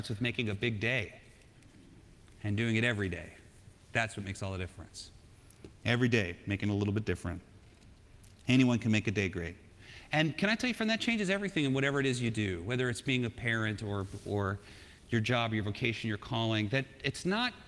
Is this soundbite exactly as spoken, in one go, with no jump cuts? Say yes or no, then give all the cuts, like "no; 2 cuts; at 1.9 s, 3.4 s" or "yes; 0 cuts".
yes; 0 cuts